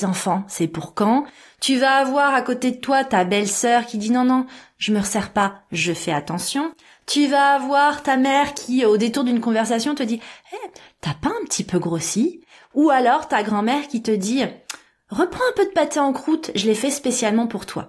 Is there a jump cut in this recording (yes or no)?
no